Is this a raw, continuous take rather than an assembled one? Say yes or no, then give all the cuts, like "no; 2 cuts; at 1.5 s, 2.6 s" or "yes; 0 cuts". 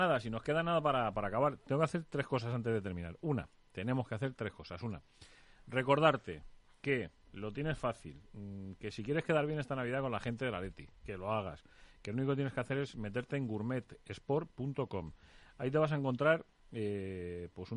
yes; 0 cuts